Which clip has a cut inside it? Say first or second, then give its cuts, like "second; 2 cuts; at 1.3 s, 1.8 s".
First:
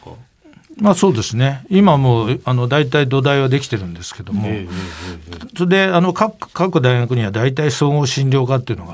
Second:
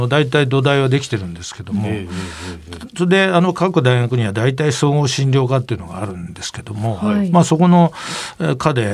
second; 1 cut; at 3.5 s